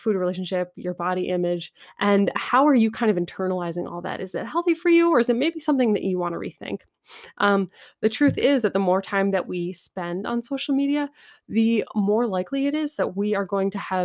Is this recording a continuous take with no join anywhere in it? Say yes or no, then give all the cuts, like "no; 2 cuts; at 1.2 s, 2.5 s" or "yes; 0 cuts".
yes; 0 cuts